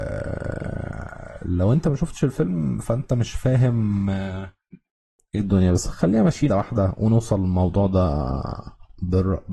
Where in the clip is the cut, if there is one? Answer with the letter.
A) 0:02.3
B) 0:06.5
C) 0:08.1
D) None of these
B